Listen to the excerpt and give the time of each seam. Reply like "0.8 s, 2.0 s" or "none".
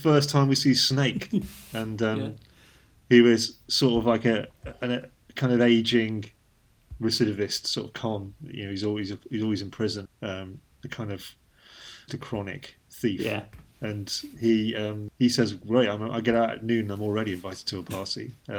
10.1 s, 12.1 s